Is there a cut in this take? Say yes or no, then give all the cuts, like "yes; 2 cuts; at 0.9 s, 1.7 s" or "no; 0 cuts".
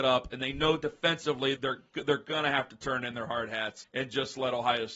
yes; 2 cuts; at 1.6 s, 3.8 s